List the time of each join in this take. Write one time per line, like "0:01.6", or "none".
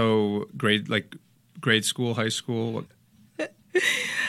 0:02.9